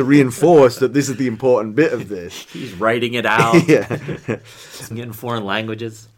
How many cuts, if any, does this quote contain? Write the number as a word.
one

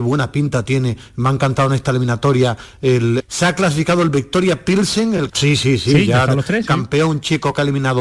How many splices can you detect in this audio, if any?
three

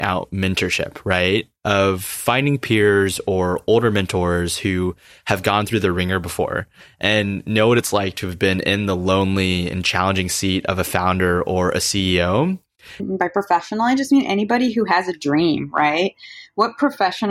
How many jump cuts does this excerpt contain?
one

